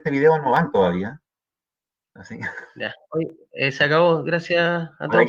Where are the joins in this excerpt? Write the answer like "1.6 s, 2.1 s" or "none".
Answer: none